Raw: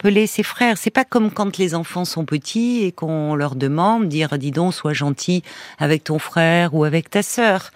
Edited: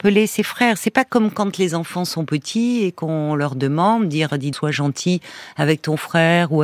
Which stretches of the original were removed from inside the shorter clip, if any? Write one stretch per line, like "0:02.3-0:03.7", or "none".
0:04.5-0:04.8